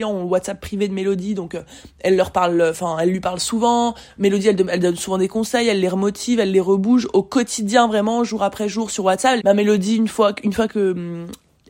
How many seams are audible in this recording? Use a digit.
1